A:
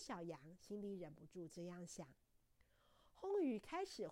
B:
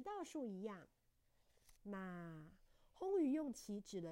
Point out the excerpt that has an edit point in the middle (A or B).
B